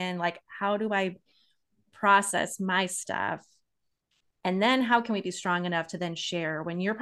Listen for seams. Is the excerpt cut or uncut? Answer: uncut